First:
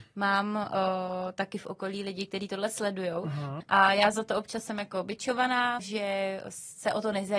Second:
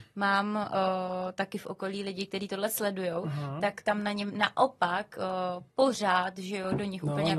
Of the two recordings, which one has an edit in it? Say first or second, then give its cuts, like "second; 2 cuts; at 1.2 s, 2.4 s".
first; 2 cuts; at 3.6 s, 5.8 s